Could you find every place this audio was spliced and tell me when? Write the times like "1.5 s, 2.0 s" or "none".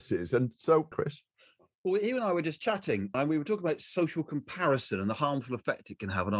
0.9 s, 3.1 s